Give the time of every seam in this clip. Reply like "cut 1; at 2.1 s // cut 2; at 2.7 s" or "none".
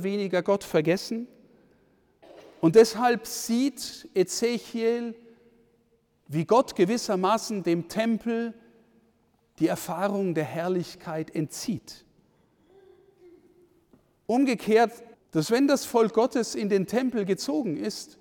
cut 1; at 15.1 s